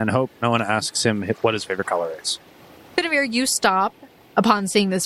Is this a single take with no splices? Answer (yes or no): yes